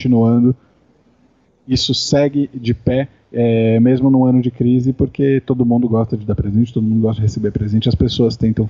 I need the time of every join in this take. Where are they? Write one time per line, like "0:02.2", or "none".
none